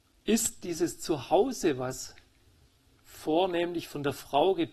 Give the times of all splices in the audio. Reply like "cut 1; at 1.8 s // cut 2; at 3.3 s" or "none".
none